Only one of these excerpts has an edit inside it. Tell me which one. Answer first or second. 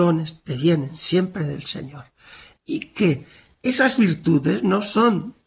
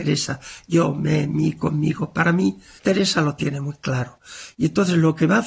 second